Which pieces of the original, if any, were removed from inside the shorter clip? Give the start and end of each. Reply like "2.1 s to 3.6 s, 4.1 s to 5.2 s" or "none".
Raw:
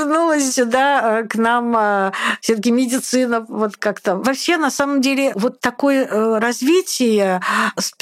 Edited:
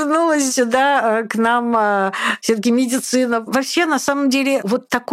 3.5 s to 4.2 s